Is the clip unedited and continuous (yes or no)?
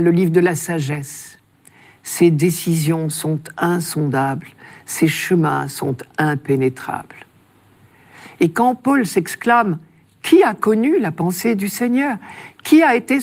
yes